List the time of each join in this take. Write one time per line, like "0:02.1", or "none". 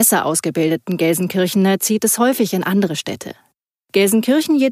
none